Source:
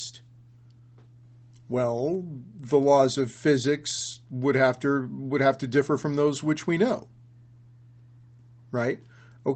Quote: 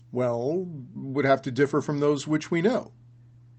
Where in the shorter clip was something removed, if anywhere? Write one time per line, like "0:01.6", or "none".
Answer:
0:00.9